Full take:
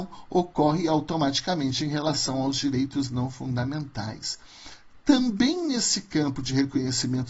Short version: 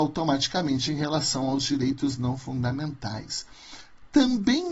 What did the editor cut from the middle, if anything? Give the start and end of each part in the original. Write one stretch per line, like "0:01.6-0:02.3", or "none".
none